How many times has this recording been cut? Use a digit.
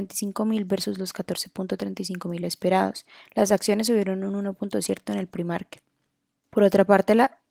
1